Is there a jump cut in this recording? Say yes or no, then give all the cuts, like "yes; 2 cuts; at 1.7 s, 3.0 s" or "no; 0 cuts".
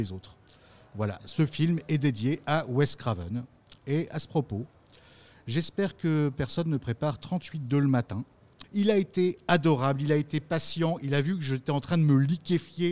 yes; 1 cut; at 8.6 s